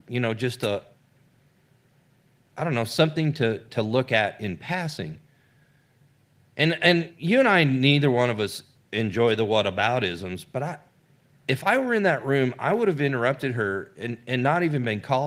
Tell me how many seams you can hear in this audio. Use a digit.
0